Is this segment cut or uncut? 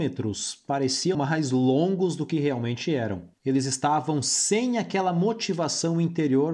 cut